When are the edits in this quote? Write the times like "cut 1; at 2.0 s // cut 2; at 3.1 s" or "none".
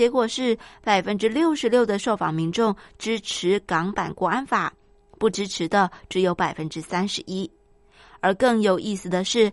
none

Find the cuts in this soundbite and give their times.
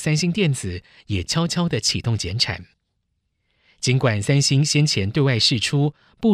none

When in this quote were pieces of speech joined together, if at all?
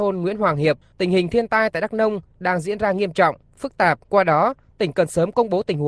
cut 1; at 0.9 s // cut 2; at 4.0 s

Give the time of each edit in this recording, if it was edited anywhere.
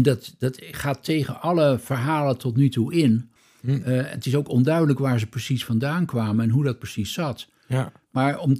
none

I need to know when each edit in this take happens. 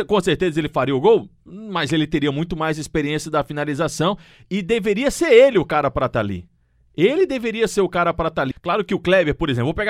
cut 1; at 8.5 s

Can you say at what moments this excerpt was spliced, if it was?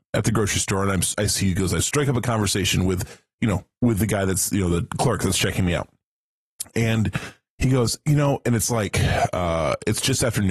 none

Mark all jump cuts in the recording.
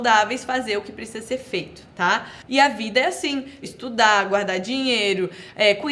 cut 1; at 2.5 s // cut 2; at 3.6 s

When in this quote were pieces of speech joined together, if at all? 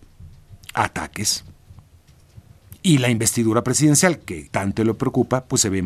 cut 1; at 4.5 s

